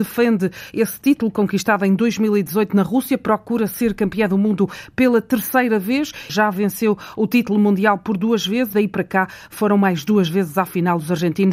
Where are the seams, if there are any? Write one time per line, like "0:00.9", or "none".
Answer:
0:06.3
0:08.7